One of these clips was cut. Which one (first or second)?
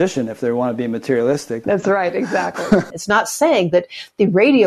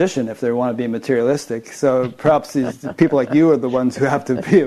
first